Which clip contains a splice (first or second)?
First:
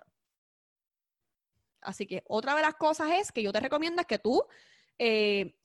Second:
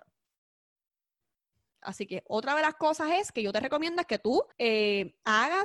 second